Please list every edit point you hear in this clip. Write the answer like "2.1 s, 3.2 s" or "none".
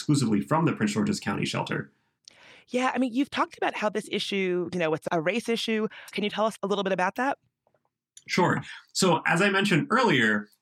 6.1 s

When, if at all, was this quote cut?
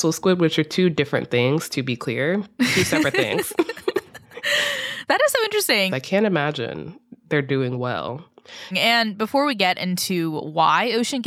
5.9 s, 8.7 s

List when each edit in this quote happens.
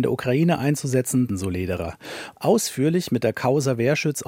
1.3 s, 2.4 s

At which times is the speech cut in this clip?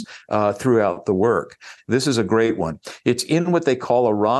1.8 s

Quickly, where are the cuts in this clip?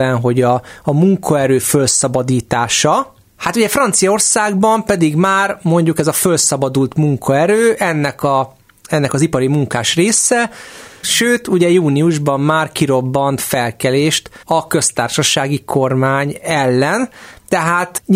11.0 s, 14.4 s

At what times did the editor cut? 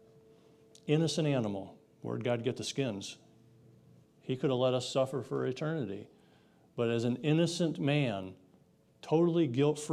1.9 s, 4.0 s

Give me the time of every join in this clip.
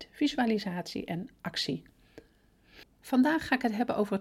none

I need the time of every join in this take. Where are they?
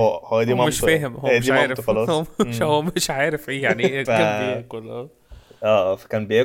4.0 s

